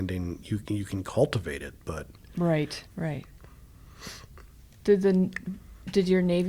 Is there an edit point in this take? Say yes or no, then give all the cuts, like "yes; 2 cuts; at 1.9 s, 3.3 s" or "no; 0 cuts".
yes; 1 cut; at 2.9 s